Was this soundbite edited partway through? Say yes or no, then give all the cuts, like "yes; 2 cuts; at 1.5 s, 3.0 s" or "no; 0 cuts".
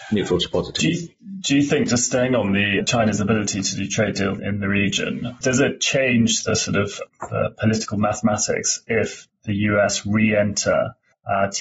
no; 0 cuts